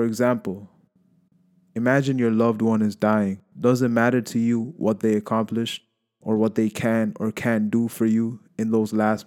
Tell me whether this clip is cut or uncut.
uncut